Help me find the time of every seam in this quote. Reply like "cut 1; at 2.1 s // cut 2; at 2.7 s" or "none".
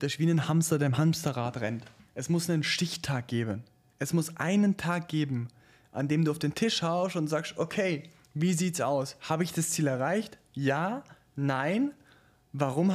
cut 1; at 2.1 s